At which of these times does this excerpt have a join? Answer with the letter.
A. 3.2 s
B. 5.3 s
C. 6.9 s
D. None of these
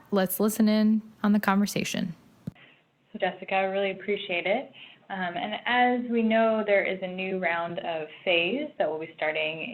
A